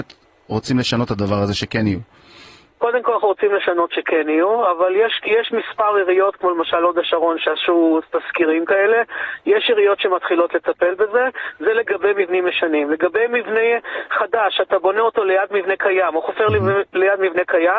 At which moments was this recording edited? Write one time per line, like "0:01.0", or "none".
none